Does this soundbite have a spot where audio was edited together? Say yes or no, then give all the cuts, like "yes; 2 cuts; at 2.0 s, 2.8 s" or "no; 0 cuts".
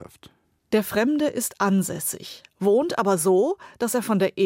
no; 0 cuts